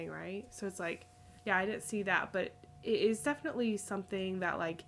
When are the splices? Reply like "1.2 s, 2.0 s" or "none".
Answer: 1.4 s